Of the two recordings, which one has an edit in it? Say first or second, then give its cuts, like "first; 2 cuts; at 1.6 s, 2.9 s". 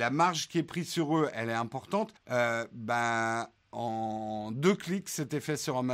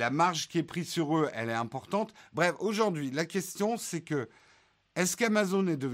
first; 1 cut; at 2.2 s